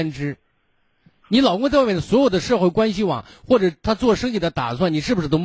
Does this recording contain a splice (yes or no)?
no